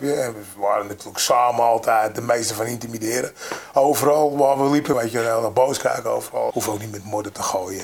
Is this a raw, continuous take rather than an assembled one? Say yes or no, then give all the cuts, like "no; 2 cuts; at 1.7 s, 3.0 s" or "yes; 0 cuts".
no; 2 cuts; at 4.9 s, 6.5 s